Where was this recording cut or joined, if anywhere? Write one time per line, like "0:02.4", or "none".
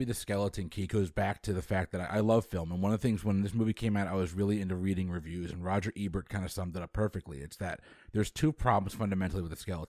none